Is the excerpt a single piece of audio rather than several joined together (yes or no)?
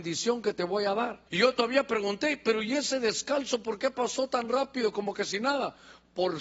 no